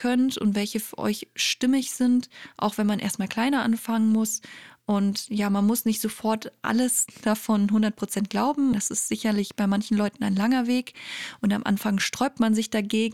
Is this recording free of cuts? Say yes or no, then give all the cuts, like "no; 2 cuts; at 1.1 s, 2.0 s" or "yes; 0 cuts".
no; 1 cut; at 8.7 s